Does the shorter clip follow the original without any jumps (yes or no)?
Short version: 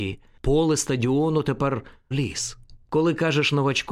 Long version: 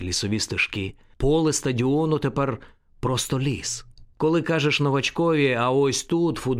no